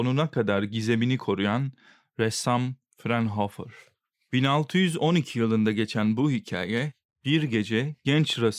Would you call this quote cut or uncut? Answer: uncut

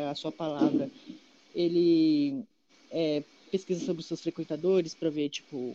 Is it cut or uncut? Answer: uncut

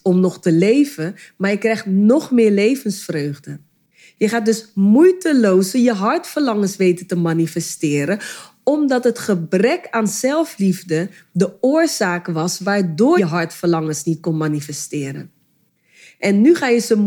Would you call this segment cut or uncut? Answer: cut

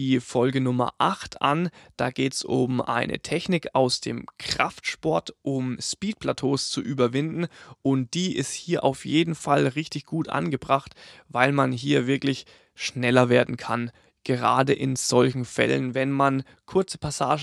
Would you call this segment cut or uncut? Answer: uncut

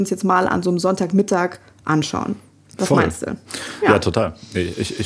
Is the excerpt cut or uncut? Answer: uncut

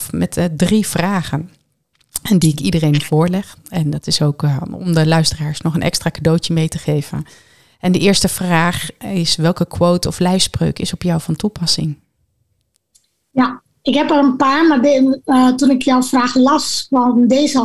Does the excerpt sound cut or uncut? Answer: uncut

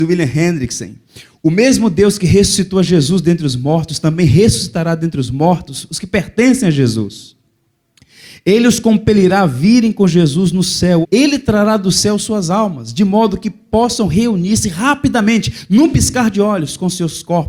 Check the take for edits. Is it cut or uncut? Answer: cut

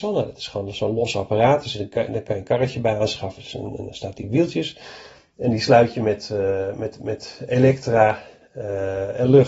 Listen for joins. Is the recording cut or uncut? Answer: uncut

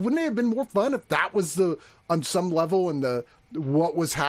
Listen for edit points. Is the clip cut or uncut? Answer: uncut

